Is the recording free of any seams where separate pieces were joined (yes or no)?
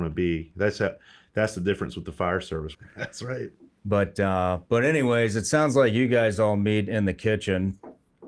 no